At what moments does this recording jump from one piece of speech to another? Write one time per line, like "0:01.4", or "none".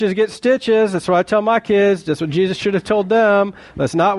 none